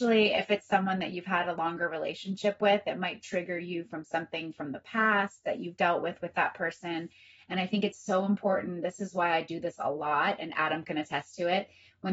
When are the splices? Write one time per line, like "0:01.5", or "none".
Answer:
none